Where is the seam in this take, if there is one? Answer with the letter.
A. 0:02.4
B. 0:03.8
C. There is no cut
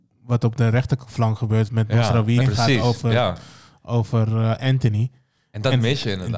A